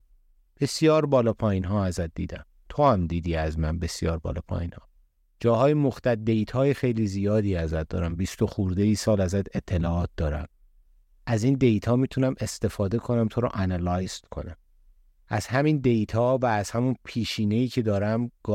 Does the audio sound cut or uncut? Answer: uncut